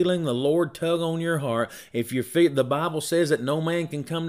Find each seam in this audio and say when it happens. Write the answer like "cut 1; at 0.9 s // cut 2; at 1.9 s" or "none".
none